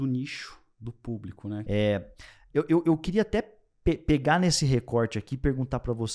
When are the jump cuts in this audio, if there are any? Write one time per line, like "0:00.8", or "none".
0:01.7